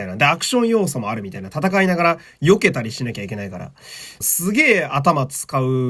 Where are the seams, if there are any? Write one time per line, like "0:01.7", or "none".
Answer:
0:04.2